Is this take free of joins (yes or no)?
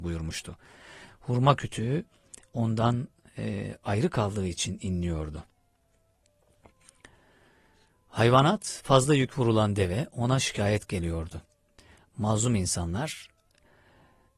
no